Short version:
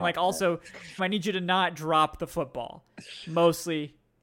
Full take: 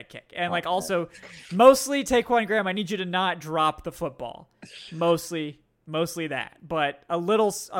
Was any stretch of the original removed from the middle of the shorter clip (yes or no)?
yes